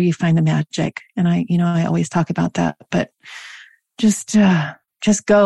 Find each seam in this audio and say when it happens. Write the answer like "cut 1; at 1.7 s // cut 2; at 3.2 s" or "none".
none

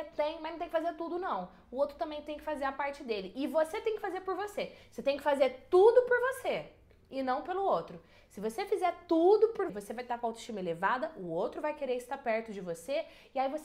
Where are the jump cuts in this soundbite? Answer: cut 1; at 9.7 s

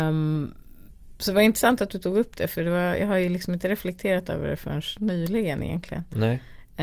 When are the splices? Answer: none

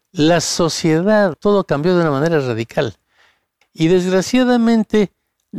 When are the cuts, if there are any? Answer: cut 1; at 1.3 s // cut 2; at 3.6 s

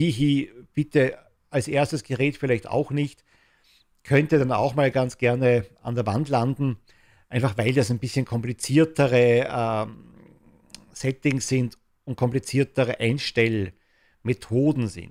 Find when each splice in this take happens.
none

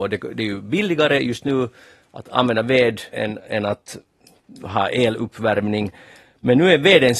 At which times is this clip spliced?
cut 1; at 3.1 s

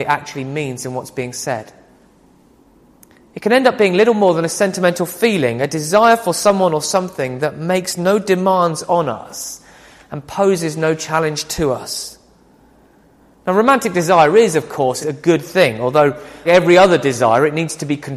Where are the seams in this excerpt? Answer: cut 1; at 15.0 s // cut 2; at 16.5 s

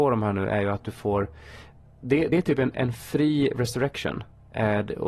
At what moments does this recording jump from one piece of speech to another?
none

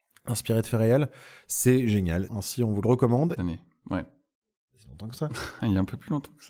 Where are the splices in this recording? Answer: cut 1; at 2.3 s // cut 2; at 3.4 s

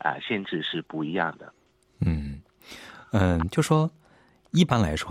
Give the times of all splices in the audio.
none

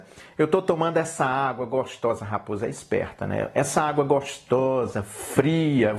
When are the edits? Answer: none

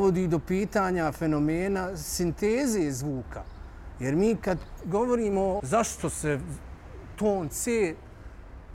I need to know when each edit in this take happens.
cut 1; at 5.6 s

